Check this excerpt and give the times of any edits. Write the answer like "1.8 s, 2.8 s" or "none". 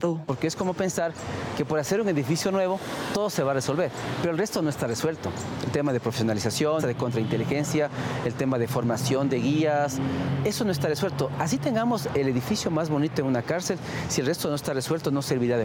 6.8 s